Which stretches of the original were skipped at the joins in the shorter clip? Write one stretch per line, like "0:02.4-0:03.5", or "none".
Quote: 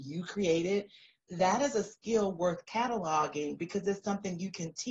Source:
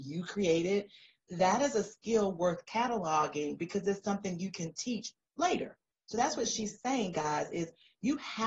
none